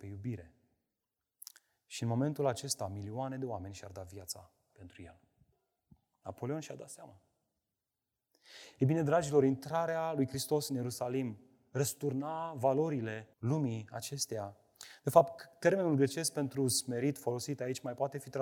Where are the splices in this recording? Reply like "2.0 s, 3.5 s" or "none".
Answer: 13.3 s